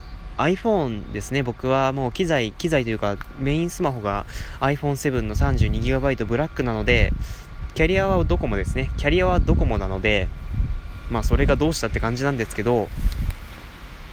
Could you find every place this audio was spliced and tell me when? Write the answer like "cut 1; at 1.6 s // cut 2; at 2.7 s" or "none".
cut 1; at 11.2 s

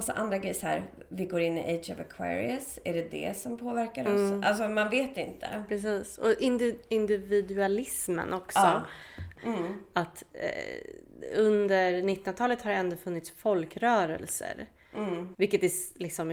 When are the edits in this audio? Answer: cut 1; at 9.4 s // cut 2; at 15.3 s

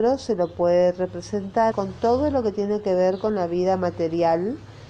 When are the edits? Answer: cut 1; at 1.7 s

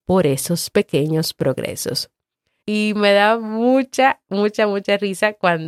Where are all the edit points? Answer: cut 1; at 2.6 s

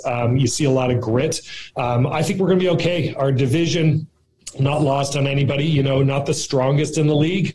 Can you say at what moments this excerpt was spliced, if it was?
none

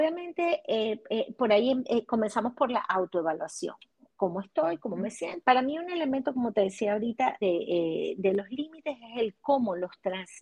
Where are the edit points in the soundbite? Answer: cut 1; at 5.4 s // cut 2; at 7.4 s

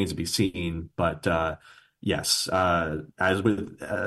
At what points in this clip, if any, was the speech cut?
none

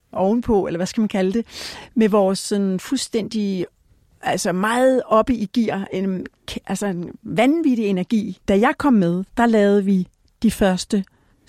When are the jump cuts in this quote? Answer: cut 1; at 9.3 s

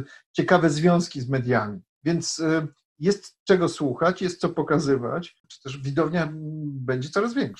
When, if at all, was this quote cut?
cut 1; at 5.4 s

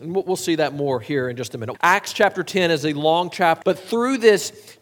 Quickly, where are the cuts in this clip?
cut 1; at 1.7 s // cut 2; at 3.6 s

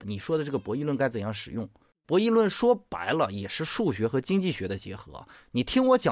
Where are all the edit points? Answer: cut 1; at 2.0 s

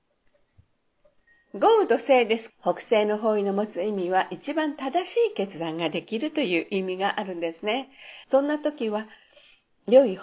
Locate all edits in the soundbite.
cut 1; at 2.5 s // cut 2; at 8.2 s

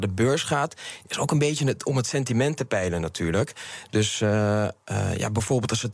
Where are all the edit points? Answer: none

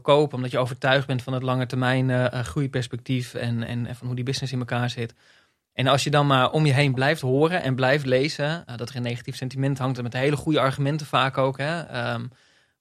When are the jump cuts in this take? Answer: cut 1; at 8.7 s

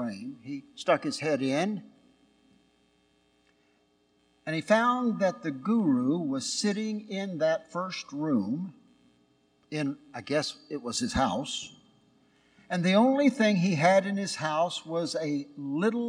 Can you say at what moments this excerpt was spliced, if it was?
none

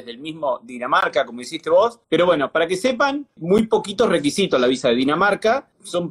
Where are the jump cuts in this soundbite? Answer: cut 1; at 2.0 s // cut 2; at 3.4 s

